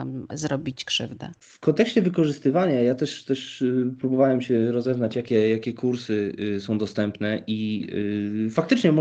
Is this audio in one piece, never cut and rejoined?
yes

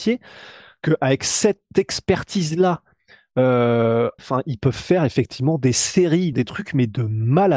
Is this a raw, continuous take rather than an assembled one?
no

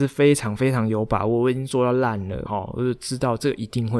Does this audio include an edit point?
yes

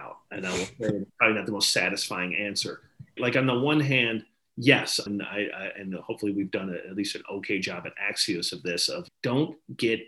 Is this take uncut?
no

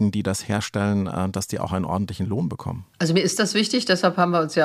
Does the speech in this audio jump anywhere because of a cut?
yes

